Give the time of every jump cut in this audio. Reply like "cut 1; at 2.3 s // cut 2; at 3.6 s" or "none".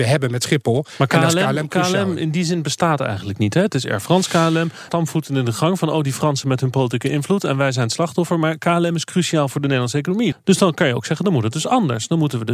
cut 1; at 4.9 s // cut 2; at 10.3 s